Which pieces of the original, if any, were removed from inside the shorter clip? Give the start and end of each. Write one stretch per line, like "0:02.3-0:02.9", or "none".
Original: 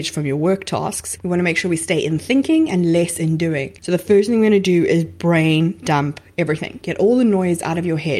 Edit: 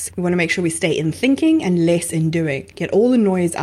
0:03.8-0:06.8